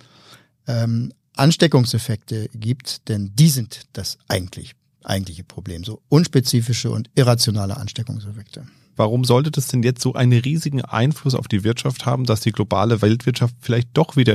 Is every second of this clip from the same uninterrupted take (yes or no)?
no